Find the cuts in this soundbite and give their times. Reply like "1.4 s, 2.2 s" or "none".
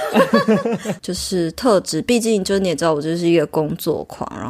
1.0 s